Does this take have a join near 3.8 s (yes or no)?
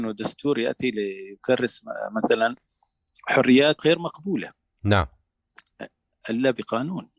yes